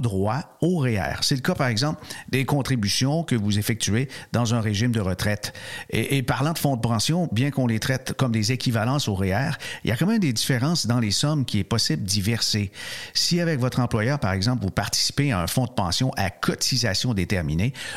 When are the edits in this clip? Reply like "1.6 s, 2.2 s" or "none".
none